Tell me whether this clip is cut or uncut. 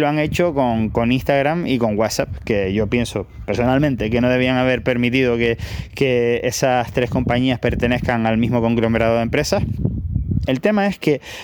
cut